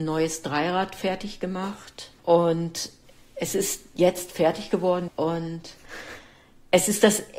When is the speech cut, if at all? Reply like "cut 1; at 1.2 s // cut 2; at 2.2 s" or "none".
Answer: cut 1; at 2.2 s // cut 2; at 5.1 s